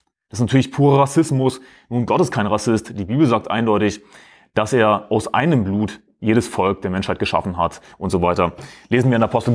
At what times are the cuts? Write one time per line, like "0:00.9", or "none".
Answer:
none